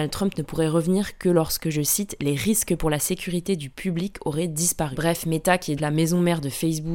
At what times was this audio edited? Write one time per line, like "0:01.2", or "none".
0:05.8